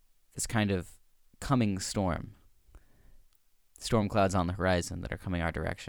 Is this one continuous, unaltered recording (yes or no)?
yes